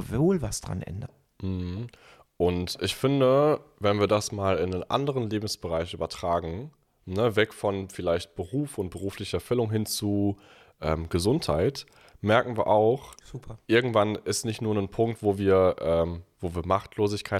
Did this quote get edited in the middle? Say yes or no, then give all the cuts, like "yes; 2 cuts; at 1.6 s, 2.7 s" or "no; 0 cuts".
no; 0 cuts